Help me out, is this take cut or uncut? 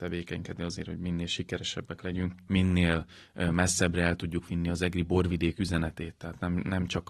uncut